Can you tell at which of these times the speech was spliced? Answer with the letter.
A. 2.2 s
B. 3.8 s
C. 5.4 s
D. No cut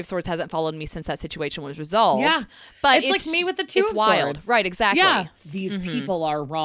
C